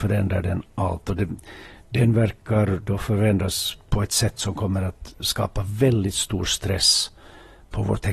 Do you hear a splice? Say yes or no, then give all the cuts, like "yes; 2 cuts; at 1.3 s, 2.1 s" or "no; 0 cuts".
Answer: no; 0 cuts